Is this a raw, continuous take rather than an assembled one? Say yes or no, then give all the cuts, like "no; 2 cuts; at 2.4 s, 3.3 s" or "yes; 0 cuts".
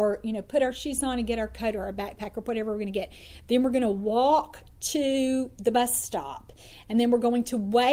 yes; 0 cuts